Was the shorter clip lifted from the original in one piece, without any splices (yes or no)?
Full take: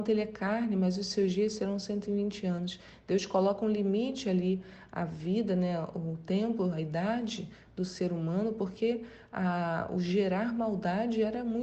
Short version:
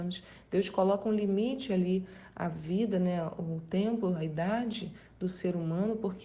yes